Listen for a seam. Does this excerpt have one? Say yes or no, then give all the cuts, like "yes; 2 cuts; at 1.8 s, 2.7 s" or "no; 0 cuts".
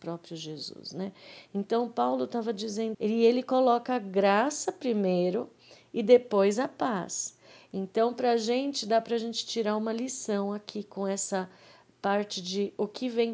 yes; 1 cut; at 2.9 s